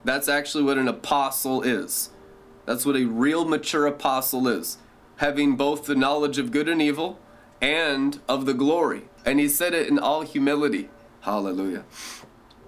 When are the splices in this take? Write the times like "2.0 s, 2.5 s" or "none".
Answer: 9.1 s, 11.1 s

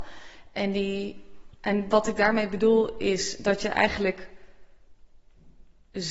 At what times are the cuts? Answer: none

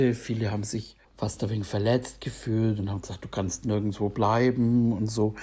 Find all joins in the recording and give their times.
1.0 s

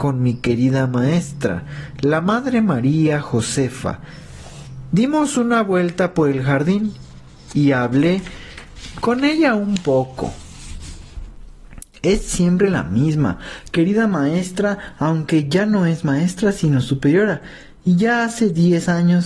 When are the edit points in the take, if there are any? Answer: none

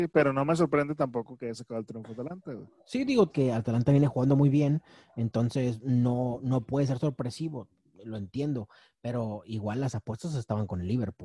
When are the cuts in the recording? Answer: 3.3 s

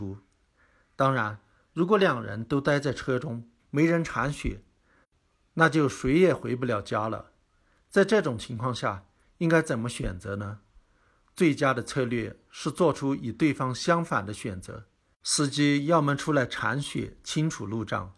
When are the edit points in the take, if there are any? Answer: 3.6 s, 15.2 s

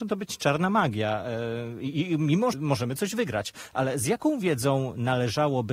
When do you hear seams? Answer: 2.5 s

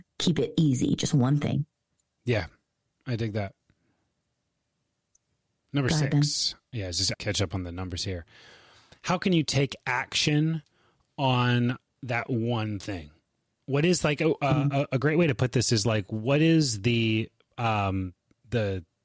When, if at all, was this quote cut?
7.1 s

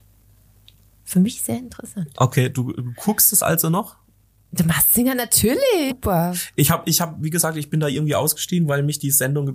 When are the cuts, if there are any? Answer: 5.9 s

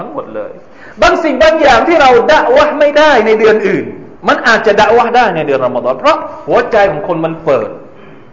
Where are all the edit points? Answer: 4.2 s

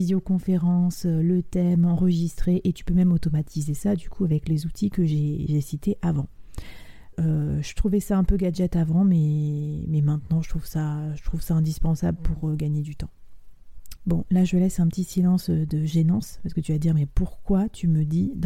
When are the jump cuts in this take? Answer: 7.1 s, 14.0 s

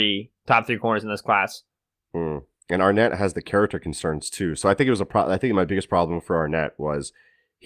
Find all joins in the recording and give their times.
2.0 s

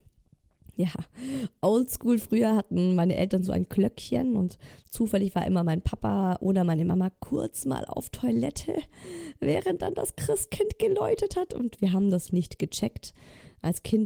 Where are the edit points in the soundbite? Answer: 12.3 s

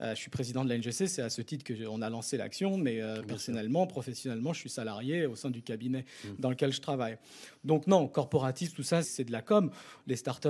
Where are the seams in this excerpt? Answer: 9.0 s

